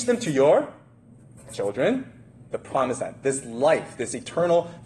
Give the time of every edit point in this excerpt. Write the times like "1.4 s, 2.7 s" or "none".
2.5 s